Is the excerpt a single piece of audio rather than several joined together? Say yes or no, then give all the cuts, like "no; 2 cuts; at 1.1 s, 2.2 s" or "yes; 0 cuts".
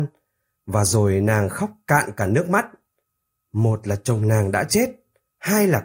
no; 1 cut; at 3.4 s